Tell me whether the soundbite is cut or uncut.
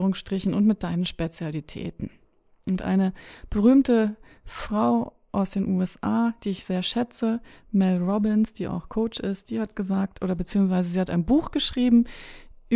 uncut